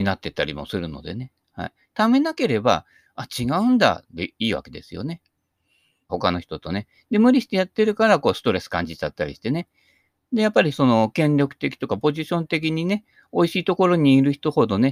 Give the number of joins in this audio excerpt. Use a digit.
1